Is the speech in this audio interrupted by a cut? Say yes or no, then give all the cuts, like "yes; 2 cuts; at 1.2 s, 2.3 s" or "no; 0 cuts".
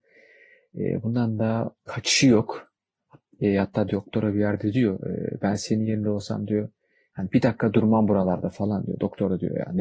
yes; 1 cut; at 1.8 s